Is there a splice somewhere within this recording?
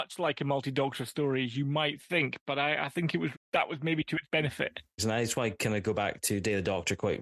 yes; 2 cuts; at 3.3 s, 5.0 s

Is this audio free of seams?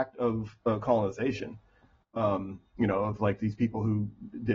yes; 0 cuts

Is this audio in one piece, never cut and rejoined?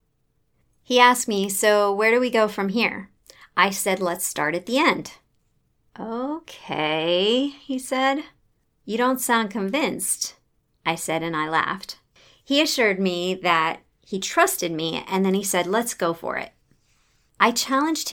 yes; 0 cuts

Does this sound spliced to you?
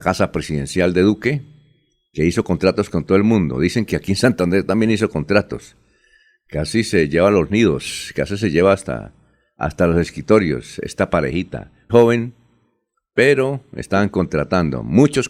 yes; 1 cut; at 11.9 s

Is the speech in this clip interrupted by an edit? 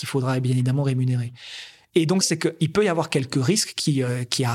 yes; 1 cut; at 2.2 s

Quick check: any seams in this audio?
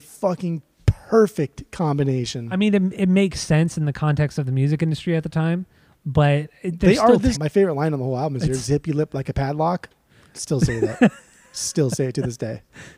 yes; 1 cut; at 7.3 s

